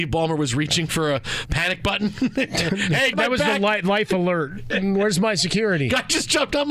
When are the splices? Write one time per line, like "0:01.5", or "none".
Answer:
0:03.1